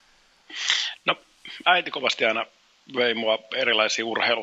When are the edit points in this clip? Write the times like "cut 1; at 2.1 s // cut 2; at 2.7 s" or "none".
none